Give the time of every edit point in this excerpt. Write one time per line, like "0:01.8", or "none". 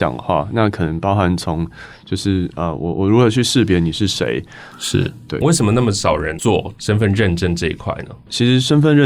0:04.7
0:06.7